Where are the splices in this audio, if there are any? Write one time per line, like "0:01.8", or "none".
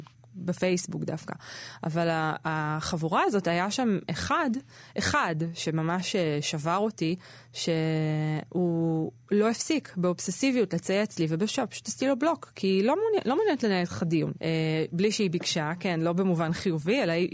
0:14.3